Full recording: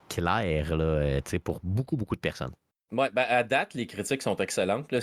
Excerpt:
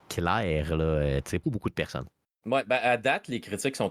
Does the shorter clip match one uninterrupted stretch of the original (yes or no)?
no